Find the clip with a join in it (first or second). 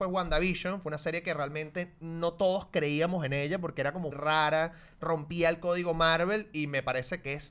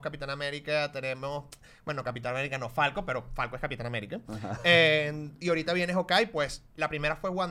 first